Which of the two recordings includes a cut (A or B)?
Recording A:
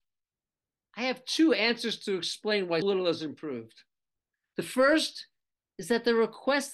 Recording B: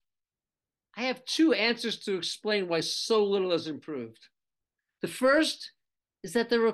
A